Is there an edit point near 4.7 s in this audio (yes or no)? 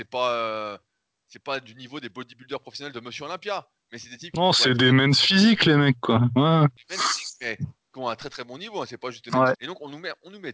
no